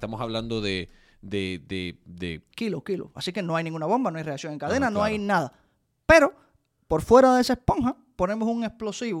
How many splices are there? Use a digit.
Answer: 1